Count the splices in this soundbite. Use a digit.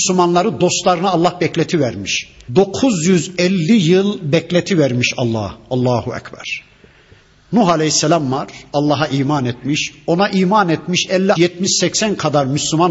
2